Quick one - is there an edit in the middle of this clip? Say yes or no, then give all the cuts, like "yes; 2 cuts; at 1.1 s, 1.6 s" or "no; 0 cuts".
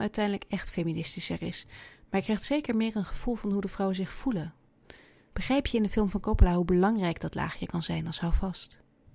yes; 1 cut; at 5.3 s